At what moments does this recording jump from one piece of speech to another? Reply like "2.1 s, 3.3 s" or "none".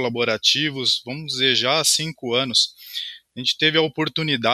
none